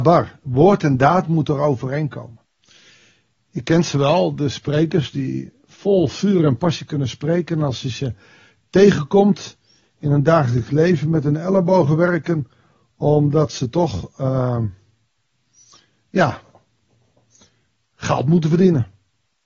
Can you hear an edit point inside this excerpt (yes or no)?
no